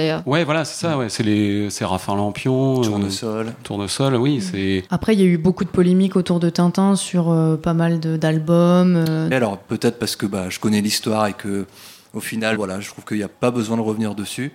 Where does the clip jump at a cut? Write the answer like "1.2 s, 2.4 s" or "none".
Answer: 4.9 s, 9.3 s, 12.5 s